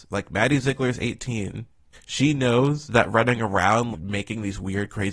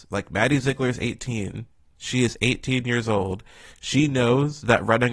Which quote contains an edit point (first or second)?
first